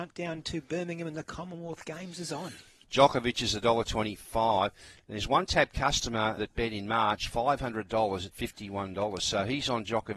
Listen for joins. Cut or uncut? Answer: cut